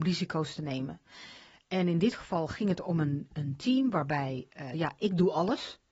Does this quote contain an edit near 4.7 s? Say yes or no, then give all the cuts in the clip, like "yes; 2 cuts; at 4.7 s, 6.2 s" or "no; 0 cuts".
yes; 1 cut; at 4.7 s